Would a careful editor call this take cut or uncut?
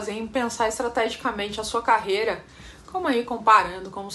uncut